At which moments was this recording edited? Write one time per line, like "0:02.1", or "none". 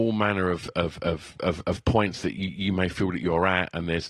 none